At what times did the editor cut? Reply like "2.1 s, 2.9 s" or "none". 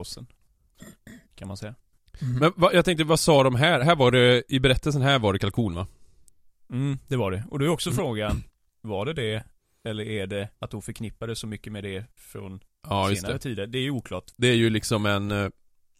10.6 s, 14.3 s